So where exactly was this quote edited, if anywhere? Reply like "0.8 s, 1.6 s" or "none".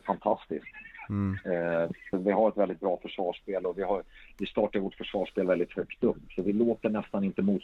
2.1 s